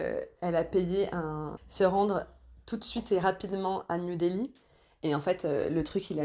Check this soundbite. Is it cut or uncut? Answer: cut